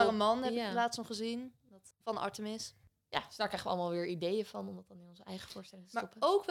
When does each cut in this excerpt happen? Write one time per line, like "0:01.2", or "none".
0:01.9